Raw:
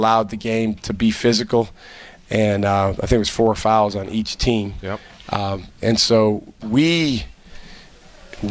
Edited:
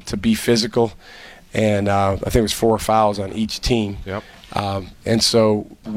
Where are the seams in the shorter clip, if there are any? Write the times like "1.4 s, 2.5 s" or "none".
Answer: none

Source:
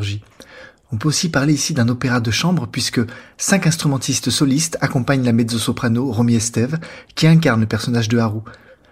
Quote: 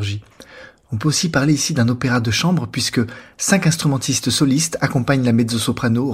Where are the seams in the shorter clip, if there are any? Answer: none

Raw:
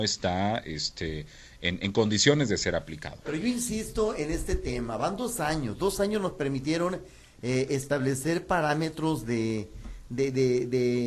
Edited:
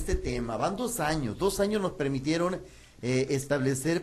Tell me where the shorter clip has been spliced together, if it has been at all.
none

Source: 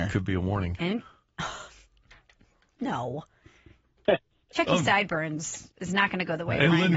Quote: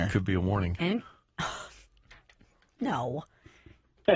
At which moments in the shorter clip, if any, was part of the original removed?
none

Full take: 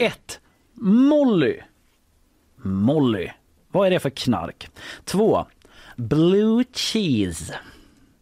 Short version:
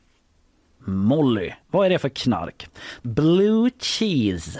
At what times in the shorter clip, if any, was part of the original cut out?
1.6 s, 3.0 s

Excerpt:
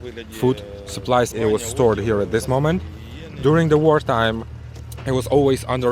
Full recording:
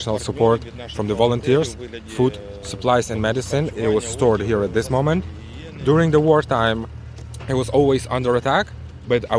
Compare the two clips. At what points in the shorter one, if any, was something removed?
1.3 s

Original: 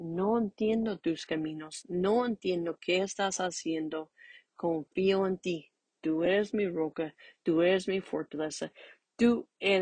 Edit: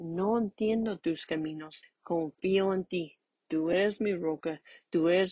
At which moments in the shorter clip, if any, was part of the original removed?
1.8 s

